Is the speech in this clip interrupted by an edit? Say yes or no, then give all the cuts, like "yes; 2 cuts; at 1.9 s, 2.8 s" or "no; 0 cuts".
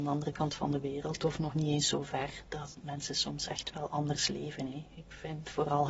no; 0 cuts